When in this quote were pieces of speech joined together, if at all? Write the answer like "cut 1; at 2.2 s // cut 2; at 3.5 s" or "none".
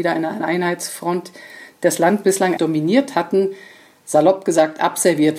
cut 1; at 2.6 s